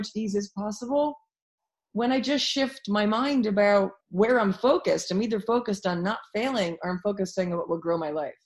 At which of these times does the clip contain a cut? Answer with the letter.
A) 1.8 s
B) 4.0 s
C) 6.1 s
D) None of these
B